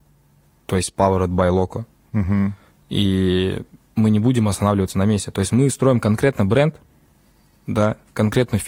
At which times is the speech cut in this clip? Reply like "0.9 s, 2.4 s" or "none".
none